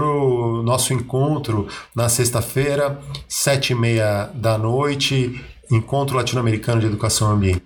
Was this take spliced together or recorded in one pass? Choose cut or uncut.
uncut